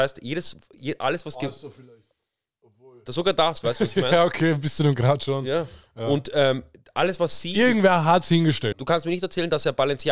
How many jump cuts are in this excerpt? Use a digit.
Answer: 1